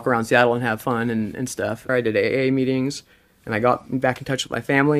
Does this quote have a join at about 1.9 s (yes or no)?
yes